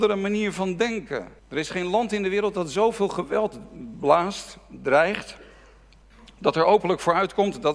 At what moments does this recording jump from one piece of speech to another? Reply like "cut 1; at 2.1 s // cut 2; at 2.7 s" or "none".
cut 1; at 1.4 s